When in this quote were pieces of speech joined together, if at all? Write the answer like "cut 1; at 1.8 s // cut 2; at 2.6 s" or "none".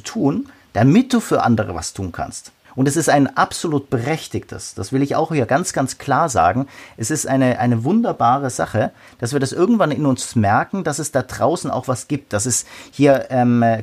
cut 1; at 2.6 s